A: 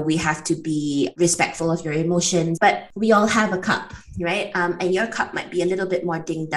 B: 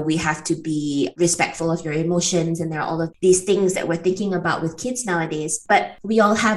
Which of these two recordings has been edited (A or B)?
A